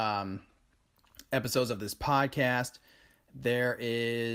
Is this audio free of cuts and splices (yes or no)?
yes